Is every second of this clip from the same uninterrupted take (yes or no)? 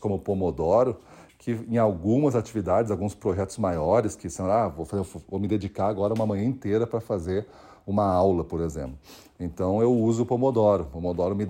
yes